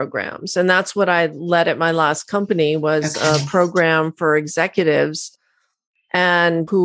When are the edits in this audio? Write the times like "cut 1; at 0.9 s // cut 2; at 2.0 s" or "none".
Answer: none